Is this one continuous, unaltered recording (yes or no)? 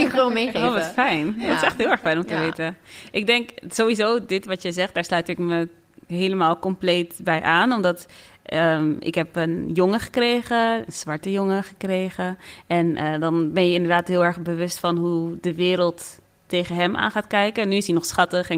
yes